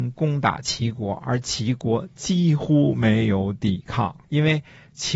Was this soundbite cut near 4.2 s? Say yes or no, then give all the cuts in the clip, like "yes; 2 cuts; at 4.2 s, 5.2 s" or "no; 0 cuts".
yes; 1 cut; at 4.2 s